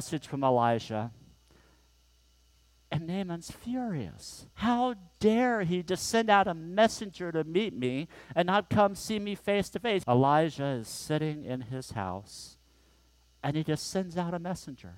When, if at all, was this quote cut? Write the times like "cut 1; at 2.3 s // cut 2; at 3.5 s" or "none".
cut 1; at 4.5 s // cut 2; at 10.0 s